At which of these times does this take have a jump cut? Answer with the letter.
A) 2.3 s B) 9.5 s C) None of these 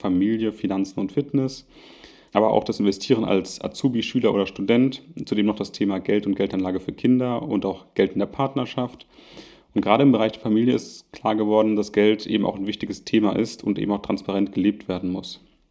A